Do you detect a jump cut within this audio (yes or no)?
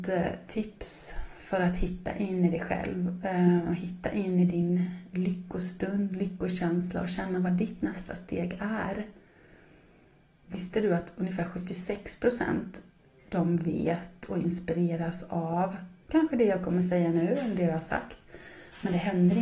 yes